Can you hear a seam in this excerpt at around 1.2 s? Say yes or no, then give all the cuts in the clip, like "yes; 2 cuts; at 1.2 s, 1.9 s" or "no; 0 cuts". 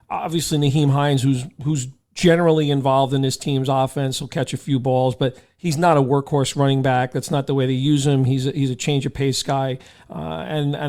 no; 0 cuts